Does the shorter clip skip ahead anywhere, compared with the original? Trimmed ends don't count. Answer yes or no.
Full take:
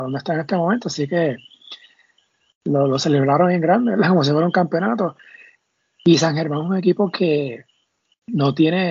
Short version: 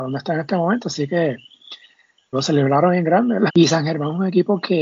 yes